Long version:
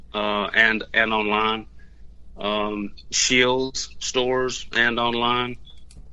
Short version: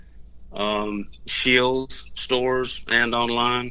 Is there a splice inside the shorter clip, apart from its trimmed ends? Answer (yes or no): no